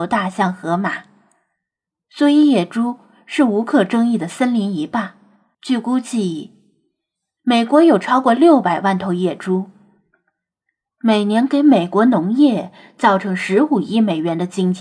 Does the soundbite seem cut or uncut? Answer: cut